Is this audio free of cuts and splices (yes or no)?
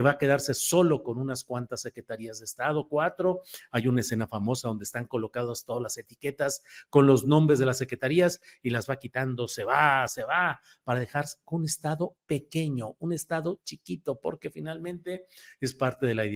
no